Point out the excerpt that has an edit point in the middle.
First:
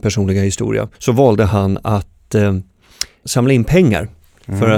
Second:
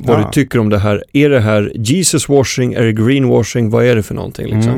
first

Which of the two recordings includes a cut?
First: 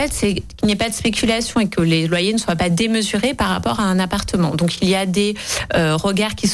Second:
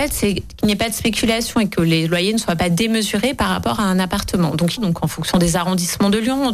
second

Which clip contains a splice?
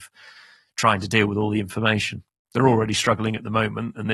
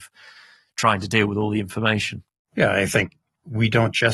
second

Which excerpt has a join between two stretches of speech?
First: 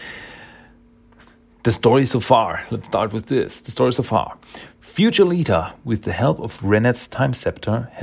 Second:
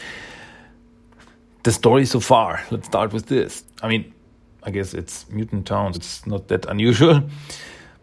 second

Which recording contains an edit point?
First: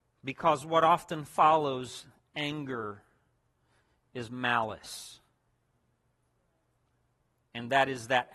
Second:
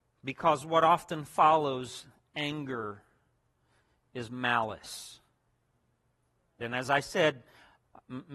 second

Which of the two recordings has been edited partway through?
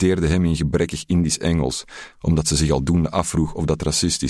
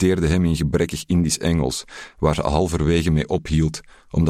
first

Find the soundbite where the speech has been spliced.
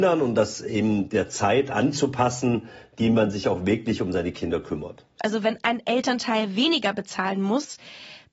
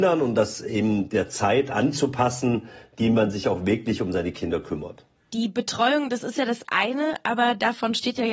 first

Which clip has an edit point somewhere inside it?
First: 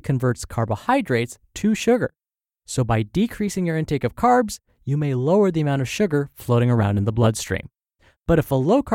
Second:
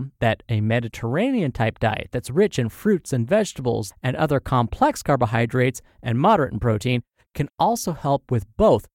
second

